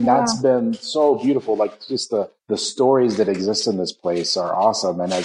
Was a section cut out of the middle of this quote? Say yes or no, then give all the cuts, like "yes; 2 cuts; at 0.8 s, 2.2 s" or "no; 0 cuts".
yes; 1 cut; at 2.4 s